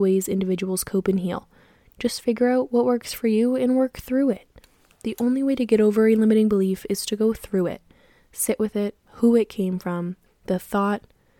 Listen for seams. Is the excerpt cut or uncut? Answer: cut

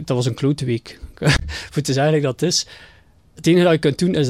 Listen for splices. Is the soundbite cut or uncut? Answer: uncut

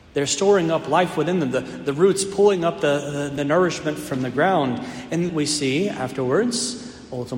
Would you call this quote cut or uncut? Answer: cut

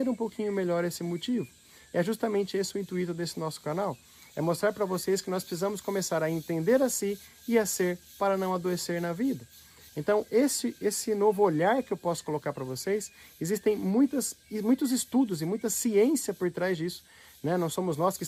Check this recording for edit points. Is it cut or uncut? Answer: uncut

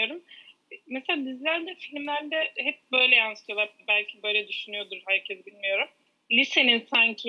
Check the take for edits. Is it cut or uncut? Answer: uncut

